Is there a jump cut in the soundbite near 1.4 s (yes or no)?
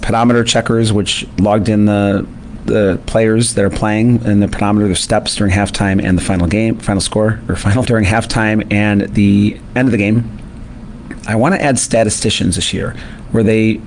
yes